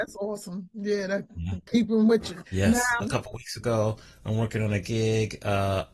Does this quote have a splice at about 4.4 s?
no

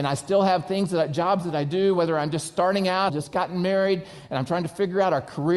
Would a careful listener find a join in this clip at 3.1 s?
yes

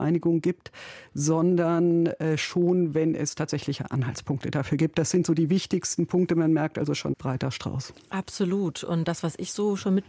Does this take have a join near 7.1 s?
yes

